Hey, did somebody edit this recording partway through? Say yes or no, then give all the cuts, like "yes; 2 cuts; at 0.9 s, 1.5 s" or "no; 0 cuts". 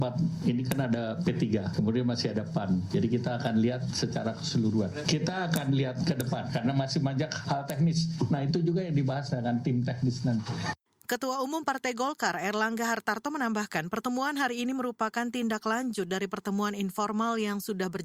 no; 0 cuts